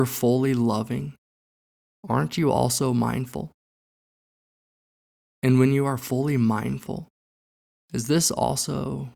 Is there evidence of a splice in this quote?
no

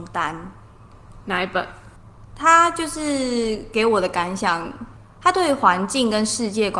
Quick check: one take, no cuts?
no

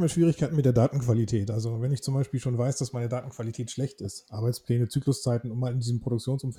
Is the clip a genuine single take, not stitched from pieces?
yes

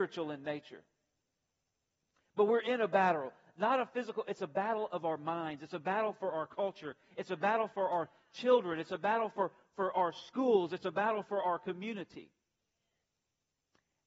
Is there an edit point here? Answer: no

